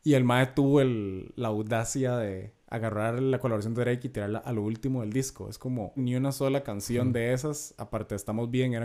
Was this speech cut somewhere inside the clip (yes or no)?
yes